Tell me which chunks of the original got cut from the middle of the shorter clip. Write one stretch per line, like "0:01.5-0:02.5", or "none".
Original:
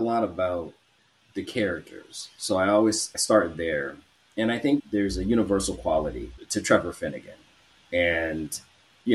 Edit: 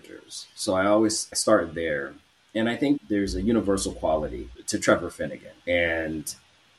0:07.4-0:07.8